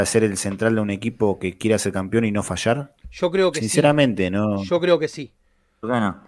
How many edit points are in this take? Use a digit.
0